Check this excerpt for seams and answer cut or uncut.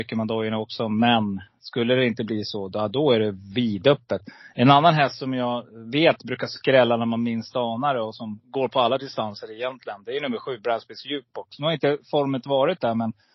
uncut